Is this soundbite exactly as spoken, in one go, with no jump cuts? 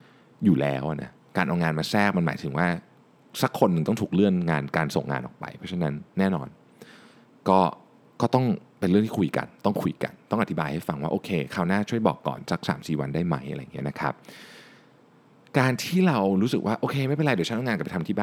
yes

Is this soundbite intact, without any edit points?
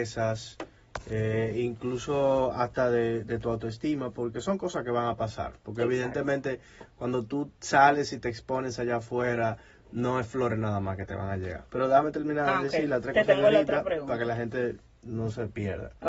no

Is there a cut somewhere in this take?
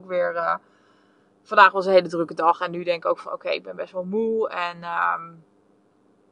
no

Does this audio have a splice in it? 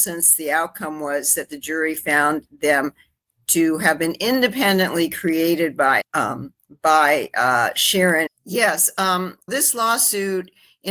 yes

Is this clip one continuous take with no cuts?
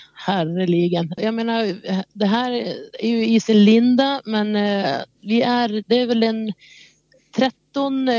no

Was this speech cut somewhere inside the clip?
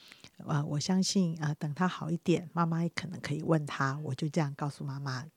no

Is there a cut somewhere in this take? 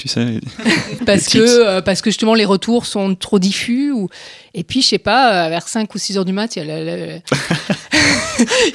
yes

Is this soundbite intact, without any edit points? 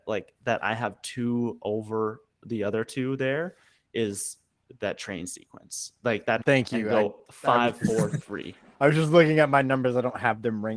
no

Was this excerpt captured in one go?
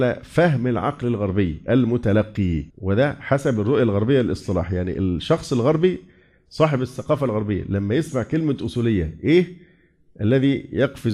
no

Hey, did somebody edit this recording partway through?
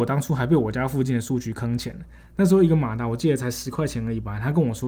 no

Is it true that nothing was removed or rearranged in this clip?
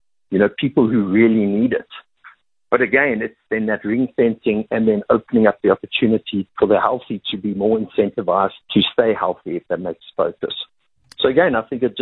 no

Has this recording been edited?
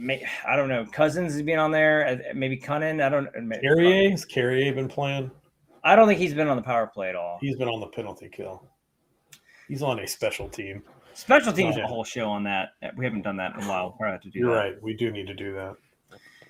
yes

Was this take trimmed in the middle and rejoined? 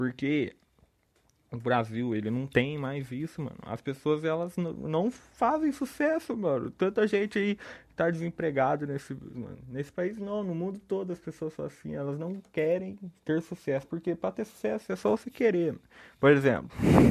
yes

